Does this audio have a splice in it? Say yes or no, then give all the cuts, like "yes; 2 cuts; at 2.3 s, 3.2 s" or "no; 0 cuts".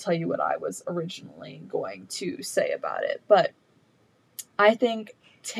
yes; 1 cut; at 4.5 s